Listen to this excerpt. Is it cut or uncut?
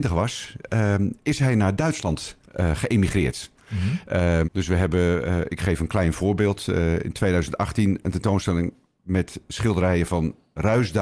cut